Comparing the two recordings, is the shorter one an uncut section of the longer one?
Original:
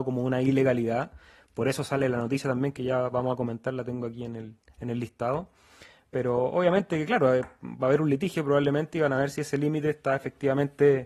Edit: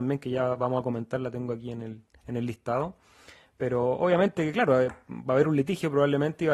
yes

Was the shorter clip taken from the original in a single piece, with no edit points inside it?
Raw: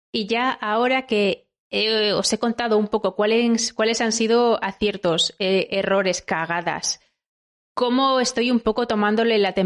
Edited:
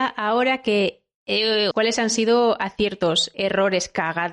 no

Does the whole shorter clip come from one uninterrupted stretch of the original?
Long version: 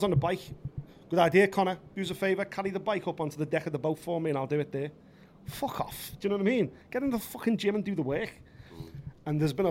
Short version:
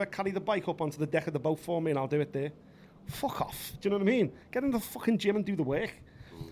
yes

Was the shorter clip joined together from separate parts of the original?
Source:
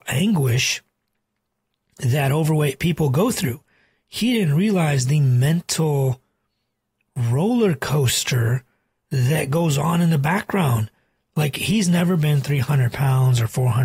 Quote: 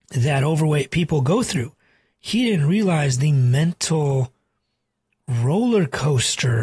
no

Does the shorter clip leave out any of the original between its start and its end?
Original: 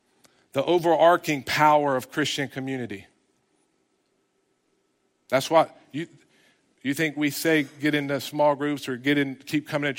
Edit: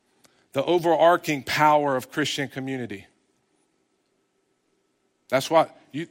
no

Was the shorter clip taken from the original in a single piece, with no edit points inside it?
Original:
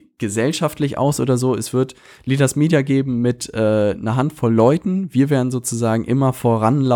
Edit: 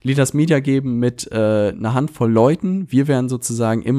yes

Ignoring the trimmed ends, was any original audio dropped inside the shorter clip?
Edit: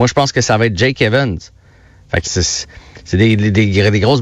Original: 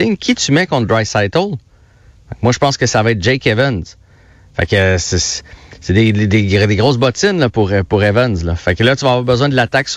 yes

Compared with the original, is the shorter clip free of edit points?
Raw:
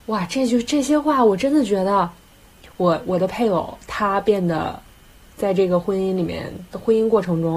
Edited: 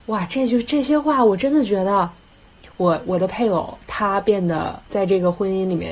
no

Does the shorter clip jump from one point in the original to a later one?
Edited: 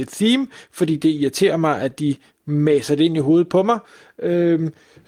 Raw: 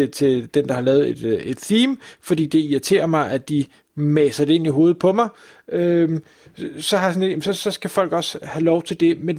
no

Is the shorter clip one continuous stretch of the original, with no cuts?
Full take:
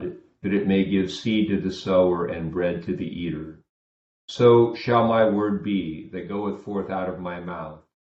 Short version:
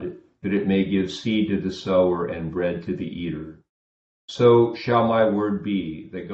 yes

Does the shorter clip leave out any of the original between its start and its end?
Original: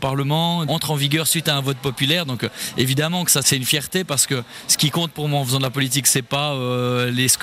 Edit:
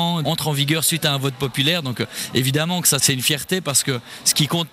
no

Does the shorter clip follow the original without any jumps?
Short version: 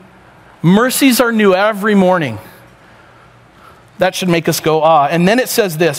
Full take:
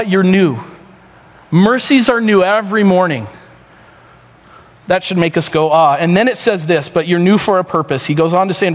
yes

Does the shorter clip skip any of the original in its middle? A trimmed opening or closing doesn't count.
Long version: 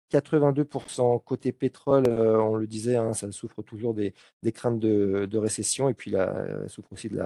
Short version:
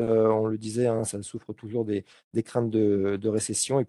no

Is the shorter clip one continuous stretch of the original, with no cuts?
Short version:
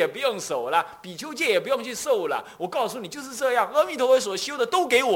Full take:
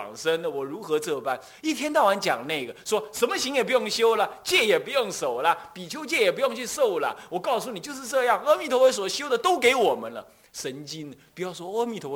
yes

